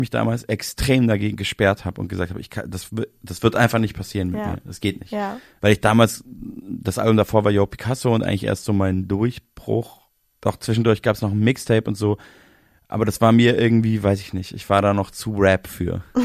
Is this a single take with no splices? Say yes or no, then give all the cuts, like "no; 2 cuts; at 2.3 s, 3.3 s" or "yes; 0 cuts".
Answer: yes; 0 cuts